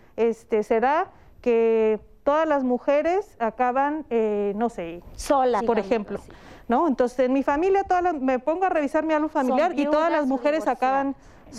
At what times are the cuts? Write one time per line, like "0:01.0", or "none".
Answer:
0:05.6